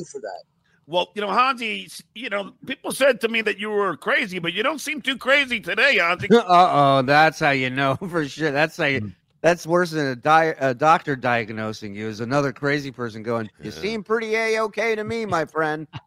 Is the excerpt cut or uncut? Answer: uncut